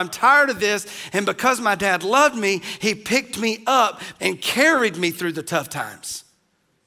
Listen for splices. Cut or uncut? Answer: cut